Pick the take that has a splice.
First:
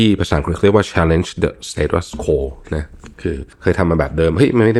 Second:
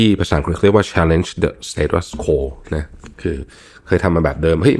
first; 1 cut; at 3.5 s

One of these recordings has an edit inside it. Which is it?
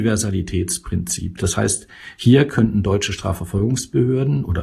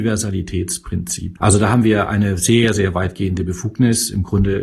second; 1 cut; at 1.4 s

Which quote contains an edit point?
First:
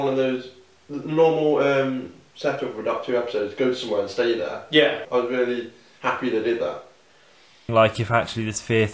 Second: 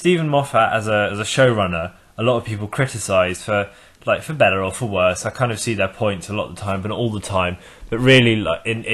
first; 2 cuts; at 5.0 s, 7.7 s

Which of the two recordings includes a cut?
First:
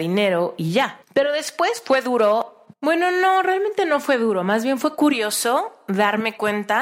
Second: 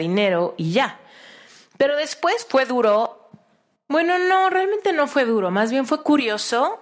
first; 2 cuts; at 1.0 s, 2.7 s

